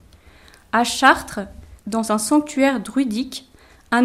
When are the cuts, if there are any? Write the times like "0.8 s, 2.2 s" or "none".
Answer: 1.8 s